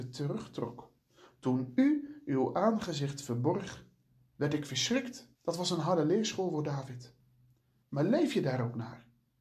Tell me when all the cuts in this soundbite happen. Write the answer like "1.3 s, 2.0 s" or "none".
5.3 s, 7.8 s